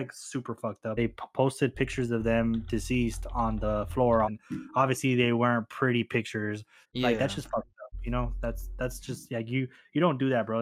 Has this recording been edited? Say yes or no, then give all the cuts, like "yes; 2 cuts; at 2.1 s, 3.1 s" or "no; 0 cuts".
yes; 3 cuts; at 1.0 s, 4.2 s, 6.8 s